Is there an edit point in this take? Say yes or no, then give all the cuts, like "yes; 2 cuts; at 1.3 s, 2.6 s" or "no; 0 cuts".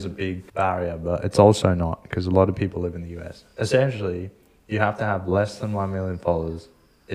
no; 0 cuts